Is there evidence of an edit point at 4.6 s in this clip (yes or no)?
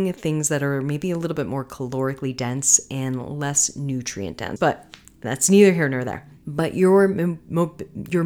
yes